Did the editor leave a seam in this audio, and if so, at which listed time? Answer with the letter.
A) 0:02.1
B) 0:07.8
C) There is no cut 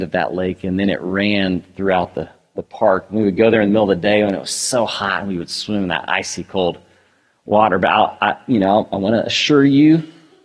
C